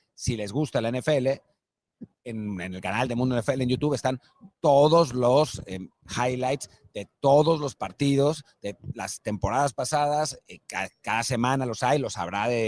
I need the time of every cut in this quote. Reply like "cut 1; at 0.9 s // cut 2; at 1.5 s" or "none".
none